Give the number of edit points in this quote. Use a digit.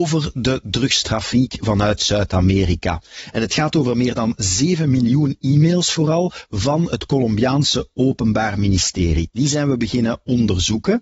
0